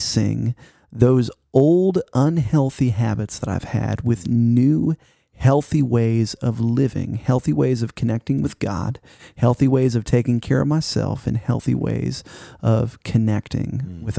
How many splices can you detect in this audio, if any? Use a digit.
0